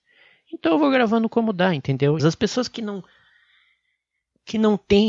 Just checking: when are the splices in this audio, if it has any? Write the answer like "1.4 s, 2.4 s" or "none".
2.2 s

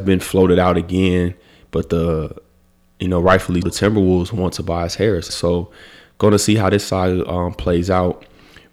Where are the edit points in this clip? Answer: 3.6 s, 5.3 s

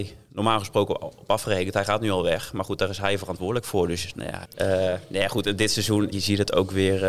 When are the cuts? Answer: 4.4 s, 6.1 s

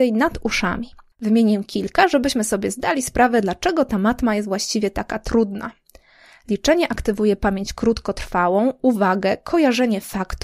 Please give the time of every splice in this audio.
1.1 s

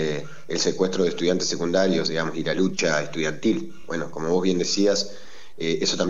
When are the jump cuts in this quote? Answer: none

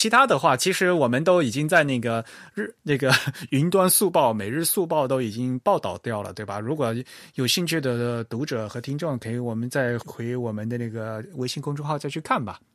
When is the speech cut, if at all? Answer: 10.0 s

